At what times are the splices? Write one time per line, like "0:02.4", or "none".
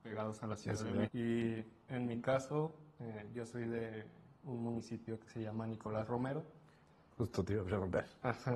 0:01.0